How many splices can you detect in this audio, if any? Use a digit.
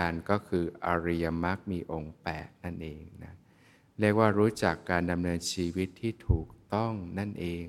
0